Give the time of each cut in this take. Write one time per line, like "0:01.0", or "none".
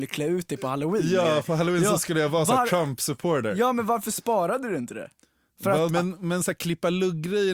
0:05.9